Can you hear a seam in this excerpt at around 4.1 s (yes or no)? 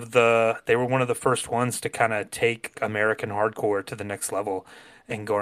no